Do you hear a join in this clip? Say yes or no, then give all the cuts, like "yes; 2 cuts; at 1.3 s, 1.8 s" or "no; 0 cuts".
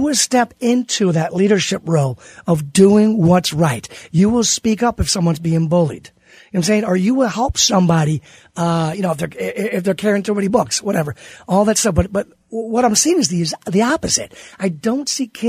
no; 0 cuts